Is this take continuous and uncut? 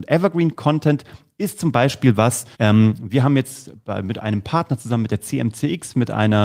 no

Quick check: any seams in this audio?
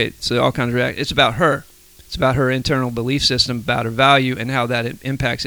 no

